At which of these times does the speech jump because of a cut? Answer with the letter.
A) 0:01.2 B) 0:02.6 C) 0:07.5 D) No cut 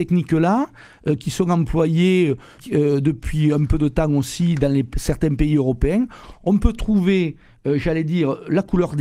B